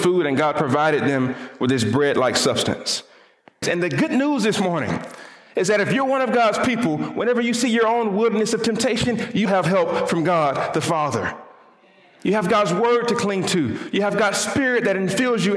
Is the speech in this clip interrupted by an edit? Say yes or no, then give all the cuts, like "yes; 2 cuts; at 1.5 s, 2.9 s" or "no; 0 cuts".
yes; 2 cuts; at 3.6 s, 9.5 s